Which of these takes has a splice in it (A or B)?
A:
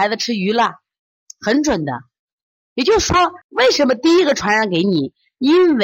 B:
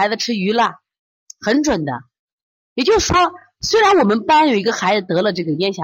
A